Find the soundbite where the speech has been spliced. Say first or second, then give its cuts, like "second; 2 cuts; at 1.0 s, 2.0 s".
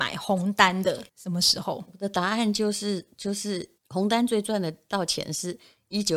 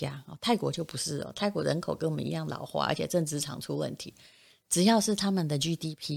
first; 2 cuts; at 1.1 s, 3.8 s